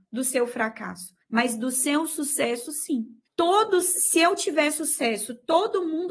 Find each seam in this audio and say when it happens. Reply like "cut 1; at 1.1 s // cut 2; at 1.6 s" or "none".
cut 1; at 3.3 s